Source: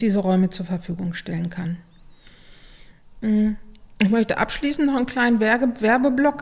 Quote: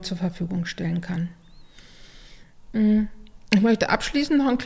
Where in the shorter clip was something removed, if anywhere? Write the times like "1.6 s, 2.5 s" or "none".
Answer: none